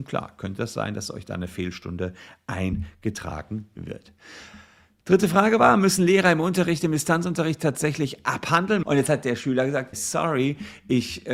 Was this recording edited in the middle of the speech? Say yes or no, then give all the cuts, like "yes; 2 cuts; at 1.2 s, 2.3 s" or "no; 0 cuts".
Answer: yes; 2 cuts; at 8.8 s, 9.9 s